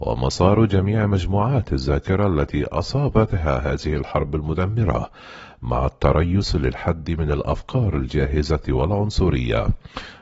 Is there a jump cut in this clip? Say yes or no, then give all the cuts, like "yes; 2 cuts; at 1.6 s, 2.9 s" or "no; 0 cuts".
no; 0 cuts